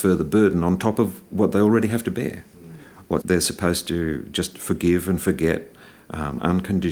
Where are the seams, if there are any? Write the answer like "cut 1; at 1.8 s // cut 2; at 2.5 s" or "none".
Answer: cut 1; at 3.2 s